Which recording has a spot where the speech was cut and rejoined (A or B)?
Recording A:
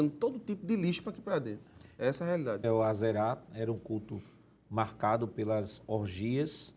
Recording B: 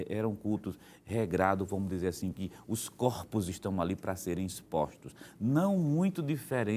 A